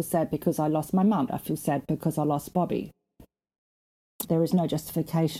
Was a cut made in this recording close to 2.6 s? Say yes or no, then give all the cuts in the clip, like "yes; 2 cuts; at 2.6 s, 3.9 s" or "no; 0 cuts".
no; 2 cuts; at 1.3 s, 4.2 s